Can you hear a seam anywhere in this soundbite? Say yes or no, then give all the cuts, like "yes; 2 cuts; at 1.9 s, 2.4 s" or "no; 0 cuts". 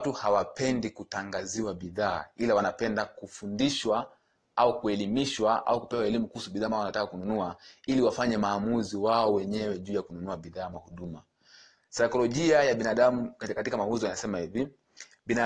no; 0 cuts